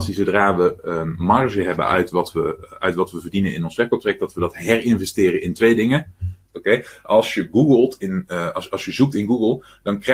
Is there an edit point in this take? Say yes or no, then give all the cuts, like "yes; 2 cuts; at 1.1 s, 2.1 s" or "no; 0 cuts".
yes; 1 cut; at 6.5 s